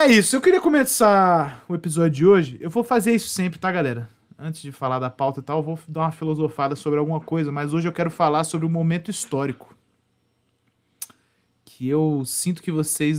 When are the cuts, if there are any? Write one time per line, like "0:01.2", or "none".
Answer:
none